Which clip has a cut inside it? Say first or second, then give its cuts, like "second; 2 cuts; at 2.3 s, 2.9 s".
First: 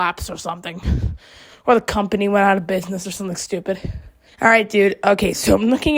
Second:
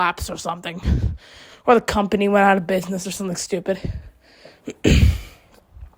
first; 1 cut; at 4.3 s